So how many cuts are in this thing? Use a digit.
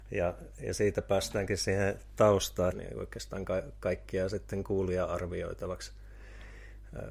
1